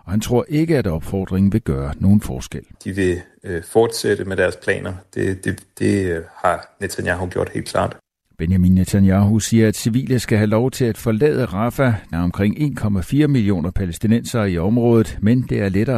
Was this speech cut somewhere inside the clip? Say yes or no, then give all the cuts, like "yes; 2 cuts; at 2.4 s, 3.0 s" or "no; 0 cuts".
yes; 2 cuts; at 2.7 s, 12.1 s